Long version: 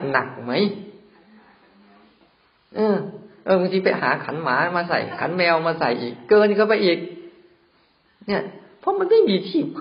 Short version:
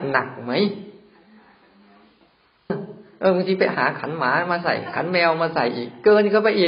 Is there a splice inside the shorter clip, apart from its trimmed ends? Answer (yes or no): yes